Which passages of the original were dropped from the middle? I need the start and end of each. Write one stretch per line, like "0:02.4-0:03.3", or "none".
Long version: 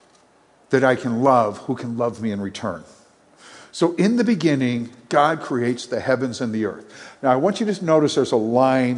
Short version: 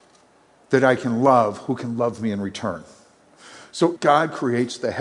0:04.0-0:05.0